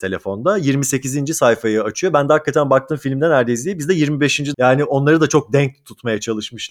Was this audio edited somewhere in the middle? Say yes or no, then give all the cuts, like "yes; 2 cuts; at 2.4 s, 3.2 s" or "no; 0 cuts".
yes; 1 cut; at 4.5 s